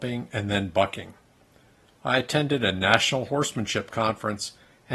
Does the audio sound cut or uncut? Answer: uncut